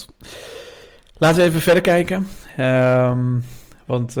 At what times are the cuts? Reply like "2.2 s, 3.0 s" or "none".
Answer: none